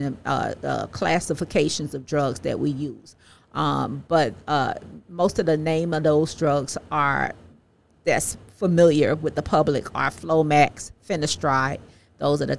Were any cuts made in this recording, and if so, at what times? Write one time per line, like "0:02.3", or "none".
none

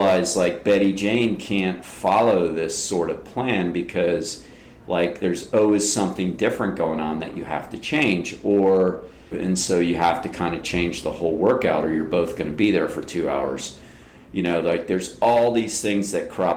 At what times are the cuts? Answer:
0:09.3

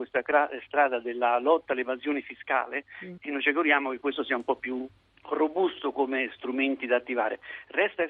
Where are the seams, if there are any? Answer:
0:03.2

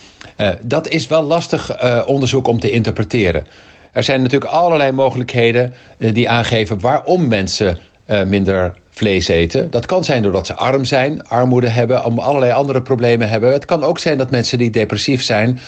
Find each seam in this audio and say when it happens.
none

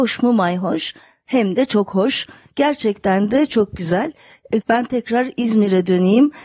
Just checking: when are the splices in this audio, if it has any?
0:04.6

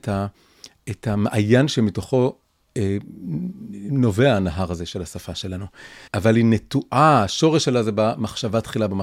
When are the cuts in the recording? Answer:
0:06.1

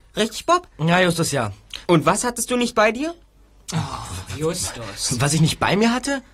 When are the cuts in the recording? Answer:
0:01.9

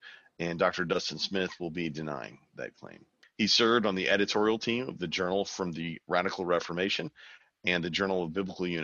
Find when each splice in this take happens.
0:03.2

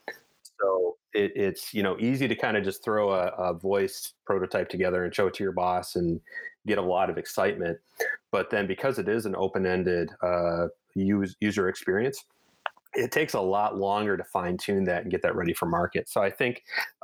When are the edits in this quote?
none

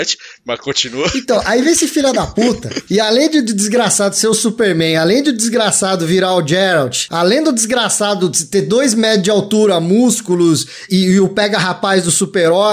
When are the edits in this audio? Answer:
0:10.9

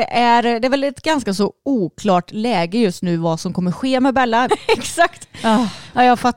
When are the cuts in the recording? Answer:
0:04.5

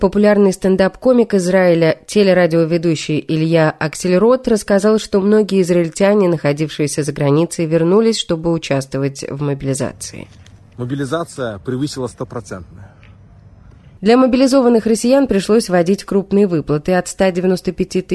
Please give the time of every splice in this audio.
0:14.0

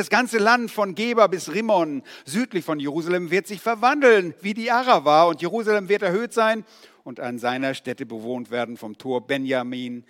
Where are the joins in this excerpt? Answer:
none

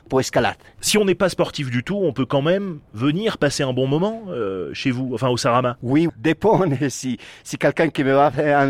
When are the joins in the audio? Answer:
0:06.1

